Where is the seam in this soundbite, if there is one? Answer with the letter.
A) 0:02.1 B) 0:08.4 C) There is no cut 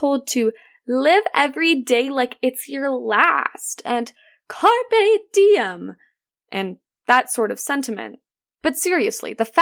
B